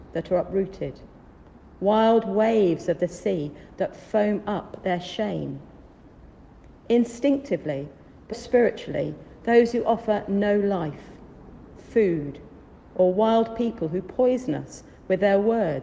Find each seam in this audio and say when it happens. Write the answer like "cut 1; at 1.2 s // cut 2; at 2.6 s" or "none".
cut 1; at 8.3 s // cut 2; at 9.4 s